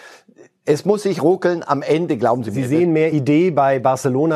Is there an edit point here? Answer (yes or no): no